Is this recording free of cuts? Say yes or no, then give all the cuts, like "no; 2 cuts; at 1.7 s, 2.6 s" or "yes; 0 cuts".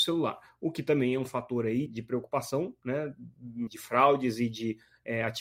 no; 2 cuts; at 1.9 s, 3.7 s